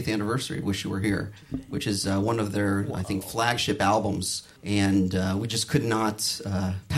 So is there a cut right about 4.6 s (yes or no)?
yes